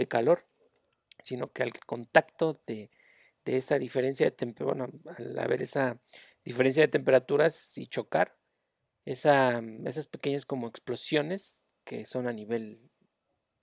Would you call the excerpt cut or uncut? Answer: uncut